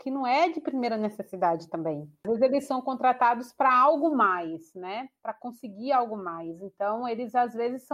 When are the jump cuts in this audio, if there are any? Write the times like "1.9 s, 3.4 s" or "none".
none

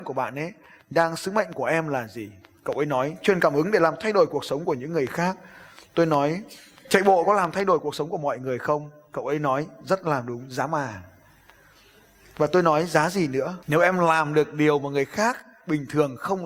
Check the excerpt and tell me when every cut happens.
13.6 s

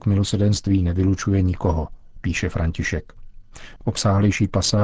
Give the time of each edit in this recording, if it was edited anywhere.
3.8 s

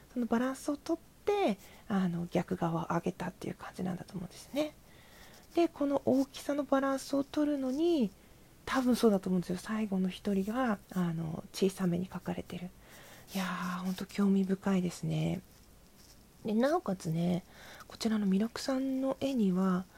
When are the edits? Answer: 10.8 s, 13.3 s

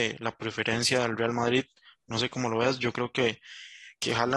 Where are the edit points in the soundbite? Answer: none

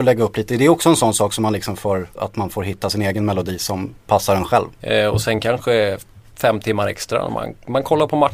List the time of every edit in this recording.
2.2 s, 4.8 s

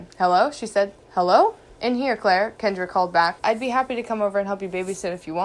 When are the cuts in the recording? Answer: 1.8 s, 3.4 s

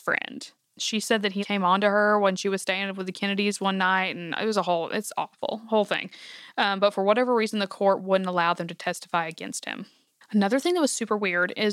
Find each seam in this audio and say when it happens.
1.4 s

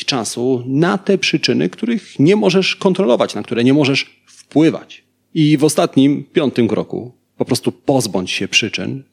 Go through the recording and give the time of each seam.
none

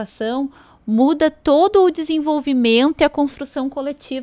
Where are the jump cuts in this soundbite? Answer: none

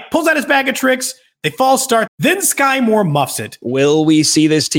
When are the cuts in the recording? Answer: 2.1 s, 3.6 s

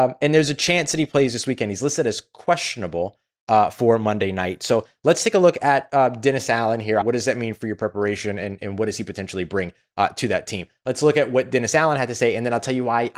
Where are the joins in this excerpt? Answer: 7.0 s

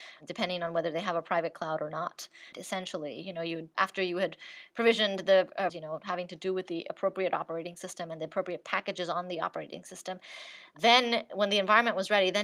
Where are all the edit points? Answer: 2.5 s, 5.7 s

